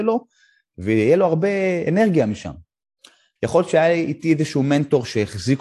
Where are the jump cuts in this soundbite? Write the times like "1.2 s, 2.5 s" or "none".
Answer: 3.4 s